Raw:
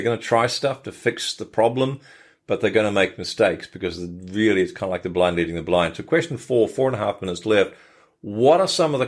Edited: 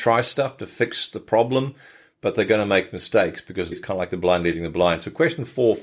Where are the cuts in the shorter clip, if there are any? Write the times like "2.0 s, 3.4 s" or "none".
3.7 s

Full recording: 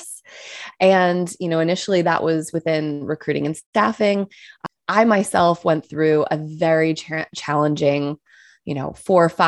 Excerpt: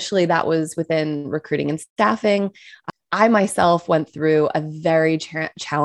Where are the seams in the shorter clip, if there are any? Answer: none

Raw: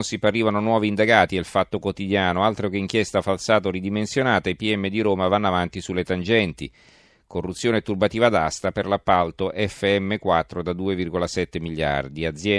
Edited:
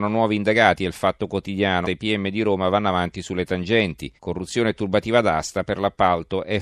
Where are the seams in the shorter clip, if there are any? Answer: 1.8 s, 4.2 s

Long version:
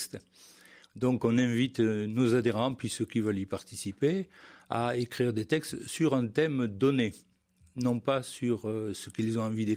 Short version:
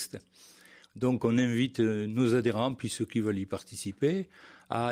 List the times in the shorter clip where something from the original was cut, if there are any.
none

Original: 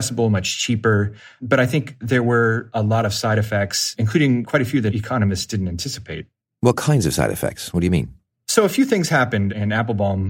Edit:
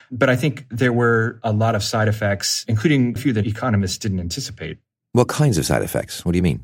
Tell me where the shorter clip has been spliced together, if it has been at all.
3.2 s

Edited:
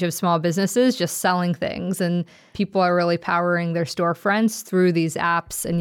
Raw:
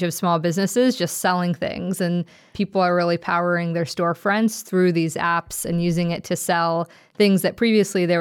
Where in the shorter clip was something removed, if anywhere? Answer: none

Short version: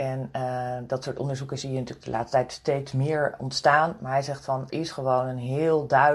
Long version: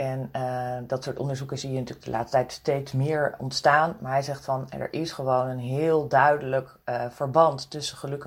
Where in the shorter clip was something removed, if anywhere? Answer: 4.7 s

